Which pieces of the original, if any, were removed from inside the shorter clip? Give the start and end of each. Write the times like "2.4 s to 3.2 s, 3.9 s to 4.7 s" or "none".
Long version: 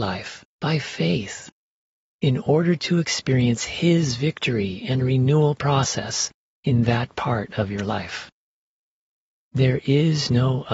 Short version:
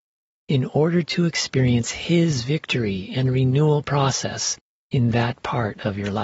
none